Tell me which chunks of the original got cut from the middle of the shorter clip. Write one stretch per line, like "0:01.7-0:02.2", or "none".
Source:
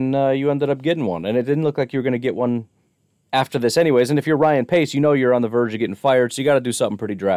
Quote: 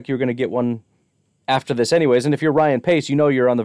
none